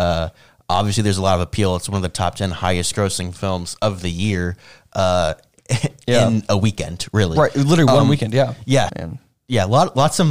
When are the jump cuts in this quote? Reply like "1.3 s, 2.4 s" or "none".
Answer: 8.9 s